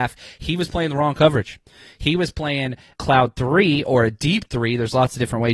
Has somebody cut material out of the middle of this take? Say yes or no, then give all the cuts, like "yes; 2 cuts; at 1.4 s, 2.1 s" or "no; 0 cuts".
yes; 1 cut; at 2.9 s